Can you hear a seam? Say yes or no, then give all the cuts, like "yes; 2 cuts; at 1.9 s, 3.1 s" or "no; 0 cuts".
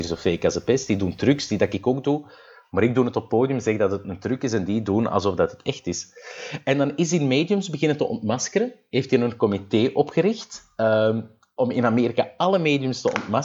no; 0 cuts